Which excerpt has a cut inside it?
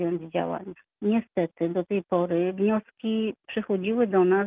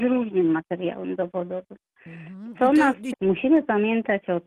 second; 1 cut; at 3.1 s

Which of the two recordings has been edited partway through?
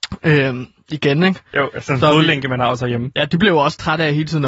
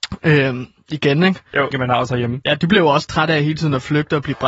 second; 1 cut; at 1.7 s

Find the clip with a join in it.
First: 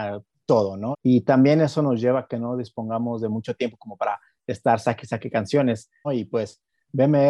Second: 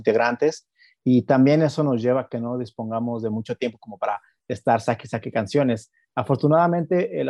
first; 2 cuts; at 0.9 s, 6.0 s

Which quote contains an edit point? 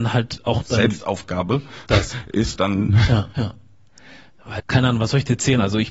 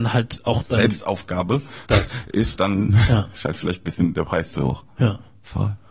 first; 2 cuts; at 3.3 s, 4.6 s

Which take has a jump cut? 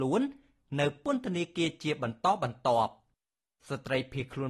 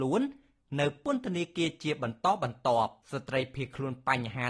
second; 1 cut; at 3.0 s

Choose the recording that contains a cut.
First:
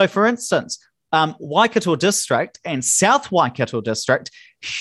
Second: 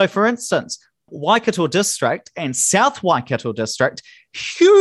second; 1 cut; at 1.1 s

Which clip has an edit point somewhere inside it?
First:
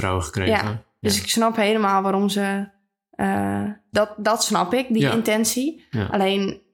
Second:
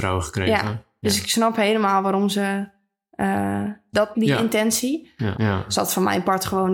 second; 2 cuts; at 4.1 s, 5.3 s

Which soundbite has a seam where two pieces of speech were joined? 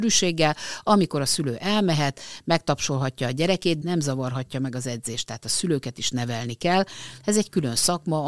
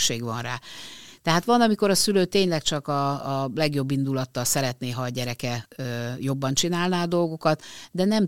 first; 1 cut; at 3.8 s

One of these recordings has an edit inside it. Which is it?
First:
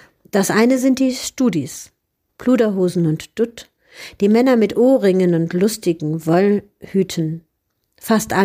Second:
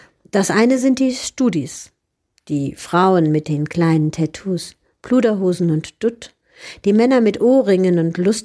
first; 1 cut; at 2.3 s

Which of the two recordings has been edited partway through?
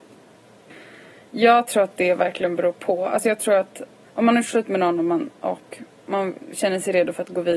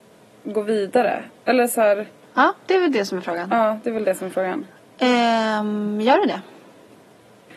first; 1 cut; at 4.0 s

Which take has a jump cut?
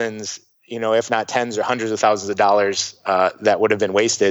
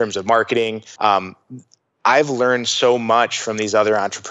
second; 1 cut; at 1.0 s

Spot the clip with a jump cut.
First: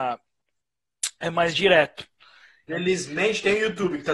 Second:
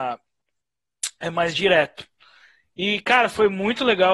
first; 1 cut; at 2.7 s

